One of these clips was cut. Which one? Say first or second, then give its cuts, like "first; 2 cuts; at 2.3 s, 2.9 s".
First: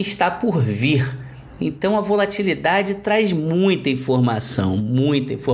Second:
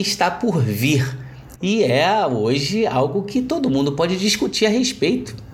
second; 1 cut; at 1.6 s